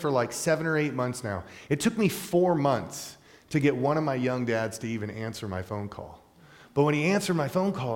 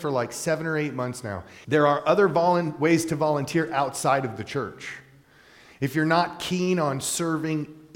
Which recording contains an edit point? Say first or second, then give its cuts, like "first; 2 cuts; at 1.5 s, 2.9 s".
second; 1 cut; at 1.6 s